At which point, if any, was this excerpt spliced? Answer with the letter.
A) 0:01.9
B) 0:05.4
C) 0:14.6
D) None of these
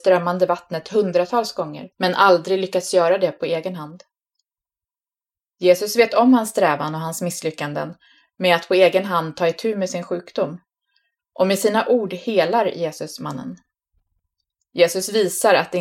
A